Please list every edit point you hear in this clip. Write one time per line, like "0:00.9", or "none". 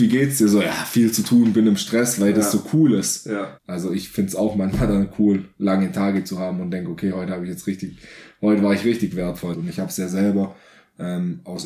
0:03.6
0:09.5